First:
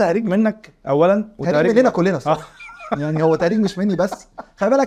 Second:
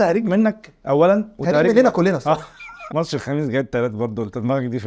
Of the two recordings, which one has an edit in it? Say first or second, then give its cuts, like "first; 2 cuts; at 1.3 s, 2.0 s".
second; 1 cut; at 2.9 s